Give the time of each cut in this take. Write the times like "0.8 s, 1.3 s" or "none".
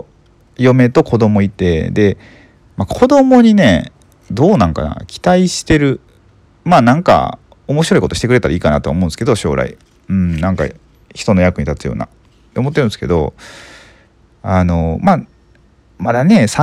none